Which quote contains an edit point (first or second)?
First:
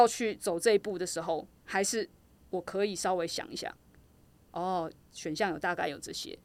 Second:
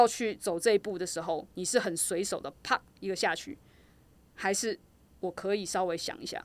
first